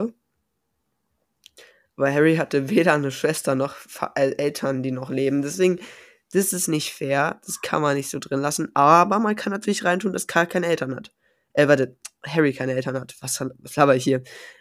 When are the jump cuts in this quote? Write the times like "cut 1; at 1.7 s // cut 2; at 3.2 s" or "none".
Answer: none